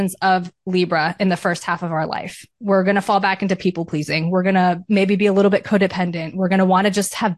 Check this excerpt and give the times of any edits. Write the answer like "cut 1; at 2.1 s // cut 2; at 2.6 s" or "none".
none